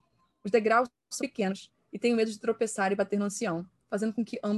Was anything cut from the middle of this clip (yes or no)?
yes